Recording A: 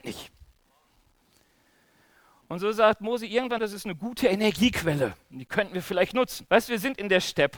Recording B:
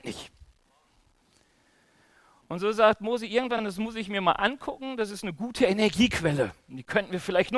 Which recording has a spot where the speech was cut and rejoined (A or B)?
A